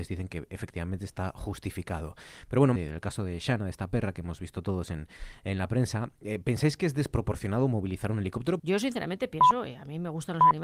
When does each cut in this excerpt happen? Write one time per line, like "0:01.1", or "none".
0:02.8
0:08.6